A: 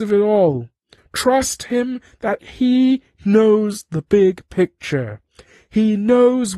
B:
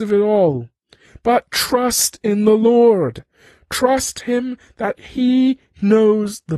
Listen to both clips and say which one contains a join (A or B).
A